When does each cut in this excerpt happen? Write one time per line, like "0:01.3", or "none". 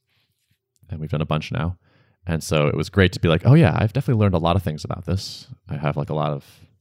none